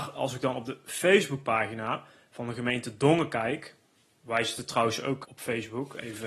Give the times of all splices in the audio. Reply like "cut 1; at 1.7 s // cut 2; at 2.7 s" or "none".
cut 1; at 5.2 s